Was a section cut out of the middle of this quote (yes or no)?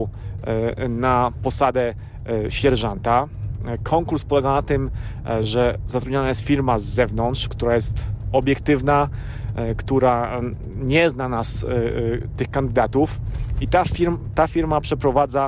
no